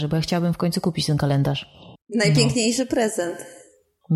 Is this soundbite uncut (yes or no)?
no